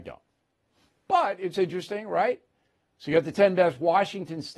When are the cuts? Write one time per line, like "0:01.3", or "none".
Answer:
none